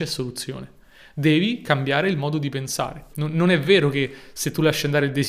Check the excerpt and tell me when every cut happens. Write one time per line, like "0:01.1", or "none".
0:03.1

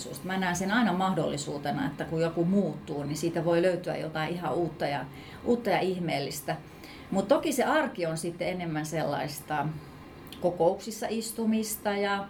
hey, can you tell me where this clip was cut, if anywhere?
none

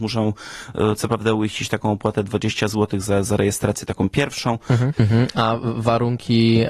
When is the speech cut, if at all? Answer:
0:04.9

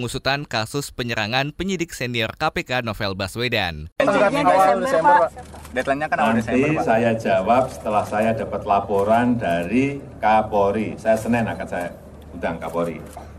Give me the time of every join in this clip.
0:04.0

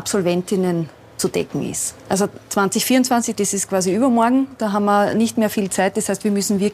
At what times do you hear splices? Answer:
none

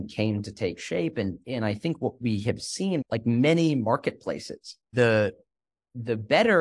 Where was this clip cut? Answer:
0:03.0
0:04.9

